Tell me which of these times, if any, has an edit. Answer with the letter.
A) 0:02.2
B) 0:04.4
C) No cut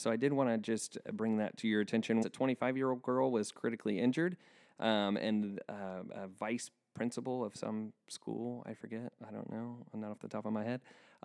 A